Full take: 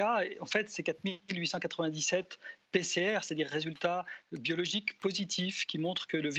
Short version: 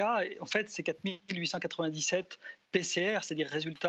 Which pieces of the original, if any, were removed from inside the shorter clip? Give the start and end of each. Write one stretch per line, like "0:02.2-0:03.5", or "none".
none